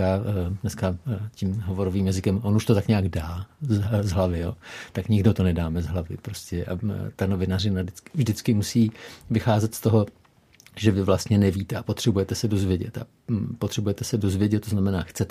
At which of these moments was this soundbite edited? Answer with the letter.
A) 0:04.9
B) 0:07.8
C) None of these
C